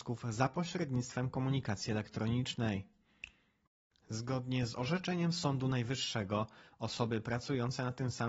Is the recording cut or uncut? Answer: uncut